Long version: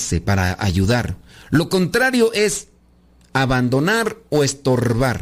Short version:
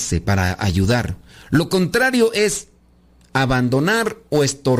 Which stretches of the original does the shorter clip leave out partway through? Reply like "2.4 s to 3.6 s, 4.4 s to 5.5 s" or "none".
none